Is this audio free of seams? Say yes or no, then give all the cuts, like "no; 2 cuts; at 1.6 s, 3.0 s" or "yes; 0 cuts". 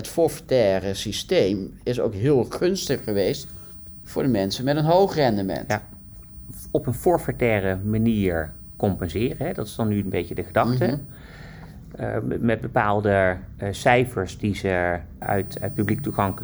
no; 1 cut; at 4.0 s